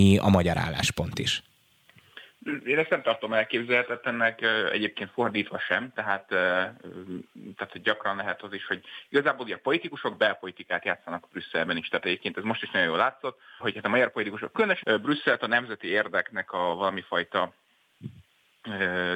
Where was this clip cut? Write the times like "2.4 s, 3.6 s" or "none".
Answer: 13.6 s, 14.8 s